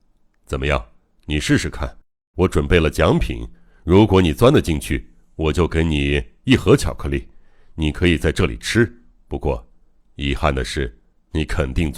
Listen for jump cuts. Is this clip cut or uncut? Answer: uncut